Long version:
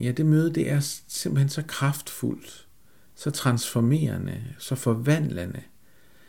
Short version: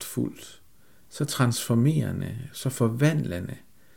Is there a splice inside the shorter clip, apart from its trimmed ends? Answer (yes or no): no